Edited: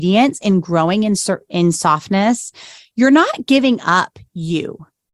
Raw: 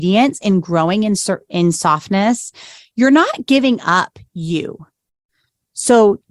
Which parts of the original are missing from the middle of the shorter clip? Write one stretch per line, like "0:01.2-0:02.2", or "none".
none